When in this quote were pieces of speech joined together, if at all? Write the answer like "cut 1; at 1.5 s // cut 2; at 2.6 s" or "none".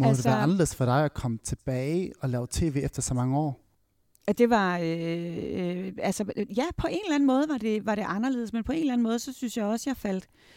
none